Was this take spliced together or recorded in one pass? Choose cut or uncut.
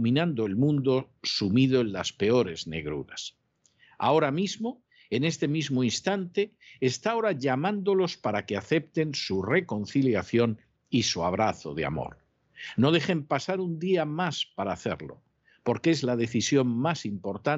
uncut